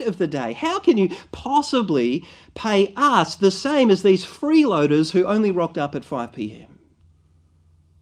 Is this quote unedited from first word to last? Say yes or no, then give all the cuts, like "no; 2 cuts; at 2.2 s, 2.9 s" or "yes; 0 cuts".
yes; 0 cuts